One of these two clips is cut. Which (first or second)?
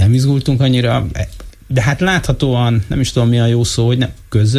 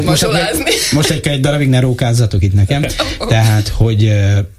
first